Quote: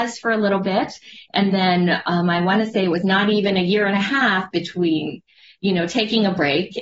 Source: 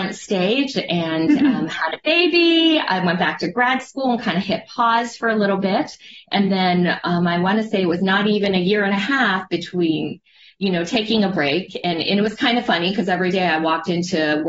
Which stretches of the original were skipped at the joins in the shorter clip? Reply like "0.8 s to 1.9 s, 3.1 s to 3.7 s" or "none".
none